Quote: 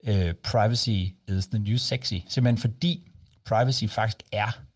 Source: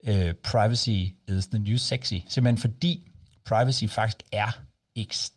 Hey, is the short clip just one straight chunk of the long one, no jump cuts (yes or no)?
yes